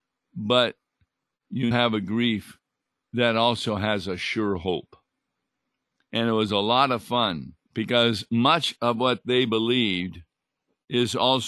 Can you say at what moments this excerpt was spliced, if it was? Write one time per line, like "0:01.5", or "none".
0:01.7
0:06.1
0:07.6